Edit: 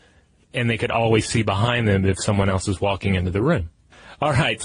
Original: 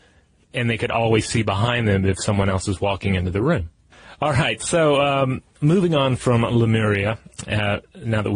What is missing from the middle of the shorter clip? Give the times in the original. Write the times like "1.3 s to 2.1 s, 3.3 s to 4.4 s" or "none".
none

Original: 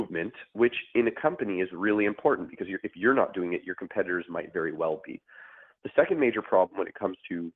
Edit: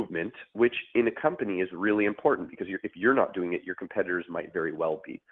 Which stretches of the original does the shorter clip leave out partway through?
none

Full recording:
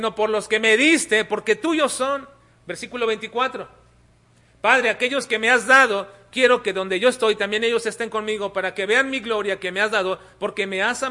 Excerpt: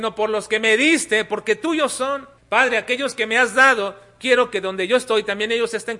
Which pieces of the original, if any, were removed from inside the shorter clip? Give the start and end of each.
2.4 s to 4.5 s

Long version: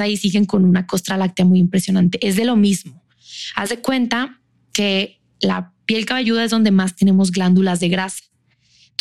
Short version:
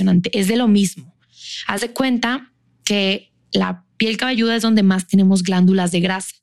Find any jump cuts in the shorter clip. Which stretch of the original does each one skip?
none

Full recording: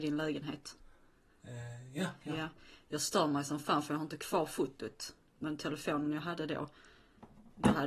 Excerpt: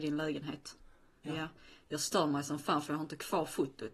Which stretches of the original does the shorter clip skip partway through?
1.2 s to 2.2 s

